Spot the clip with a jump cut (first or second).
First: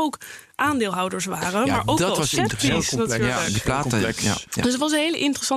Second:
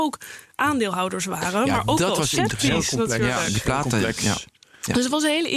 first